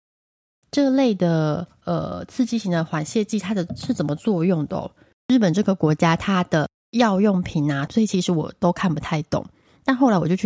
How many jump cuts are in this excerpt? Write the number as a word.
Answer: two